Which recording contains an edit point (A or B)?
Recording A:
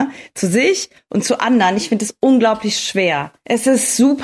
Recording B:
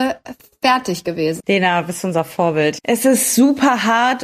B